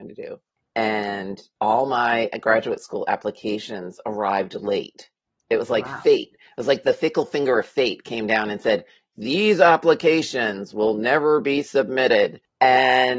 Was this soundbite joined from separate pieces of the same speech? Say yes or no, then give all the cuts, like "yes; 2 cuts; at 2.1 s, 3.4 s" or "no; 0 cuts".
no; 0 cuts